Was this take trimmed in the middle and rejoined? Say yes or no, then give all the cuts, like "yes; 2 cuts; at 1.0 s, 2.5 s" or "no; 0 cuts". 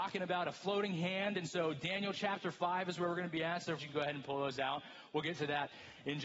yes; 1 cut; at 3.8 s